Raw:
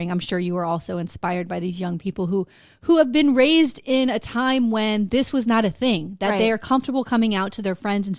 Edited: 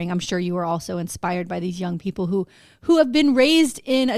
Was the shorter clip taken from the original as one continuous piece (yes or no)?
yes